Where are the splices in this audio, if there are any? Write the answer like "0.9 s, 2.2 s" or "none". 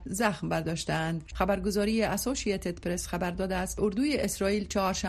1.3 s